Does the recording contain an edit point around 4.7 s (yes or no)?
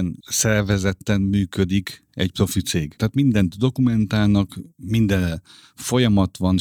no